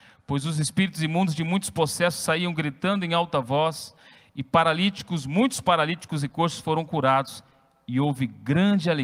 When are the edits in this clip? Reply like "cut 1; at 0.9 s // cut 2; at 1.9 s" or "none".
none